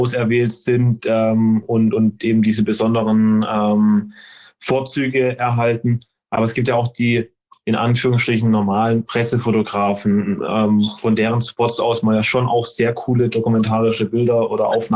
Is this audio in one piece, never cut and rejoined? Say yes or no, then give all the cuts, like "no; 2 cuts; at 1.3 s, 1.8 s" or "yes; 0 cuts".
yes; 0 cuts